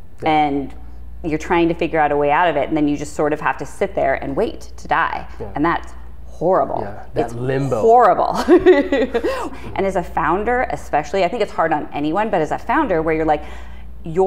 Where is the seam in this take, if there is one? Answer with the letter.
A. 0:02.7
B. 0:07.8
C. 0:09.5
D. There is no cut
C